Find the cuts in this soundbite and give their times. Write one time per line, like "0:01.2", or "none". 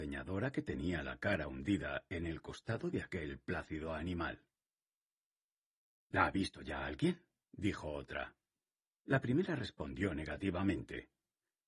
none